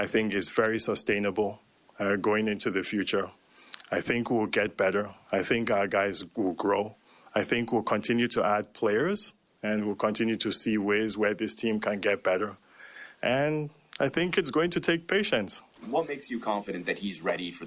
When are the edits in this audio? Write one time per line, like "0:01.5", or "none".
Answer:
0:15.8